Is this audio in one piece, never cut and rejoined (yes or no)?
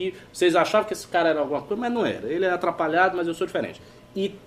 yes